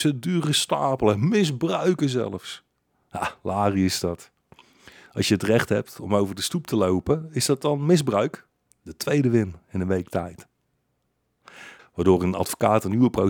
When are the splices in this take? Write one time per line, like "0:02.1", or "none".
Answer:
0:08.7
0:11.8